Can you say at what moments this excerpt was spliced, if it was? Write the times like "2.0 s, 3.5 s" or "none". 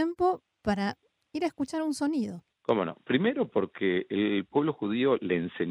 2.5 s, 4.1 s